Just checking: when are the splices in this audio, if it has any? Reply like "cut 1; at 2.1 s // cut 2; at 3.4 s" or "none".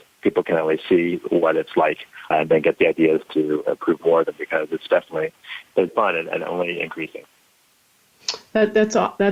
cut 1; at 2.3 s // cut 2; at 5.9 s